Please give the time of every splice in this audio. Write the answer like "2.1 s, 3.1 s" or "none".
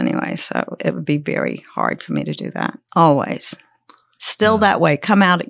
2.9 s